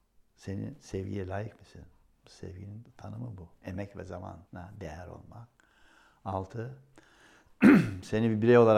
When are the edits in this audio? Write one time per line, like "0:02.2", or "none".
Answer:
0:04.5